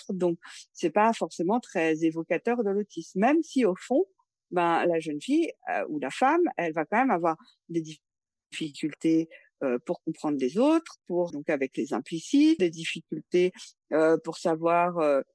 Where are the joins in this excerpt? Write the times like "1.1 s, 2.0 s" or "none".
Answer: 11.3 s, 12.6 s